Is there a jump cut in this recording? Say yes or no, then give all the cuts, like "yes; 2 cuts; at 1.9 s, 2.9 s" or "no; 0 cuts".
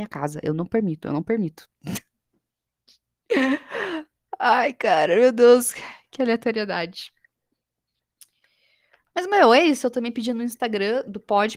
no; 0 cuts